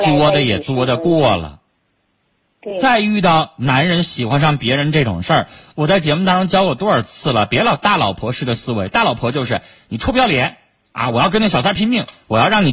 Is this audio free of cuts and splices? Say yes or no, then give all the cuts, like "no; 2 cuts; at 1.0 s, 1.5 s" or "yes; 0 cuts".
yes; 0 cuts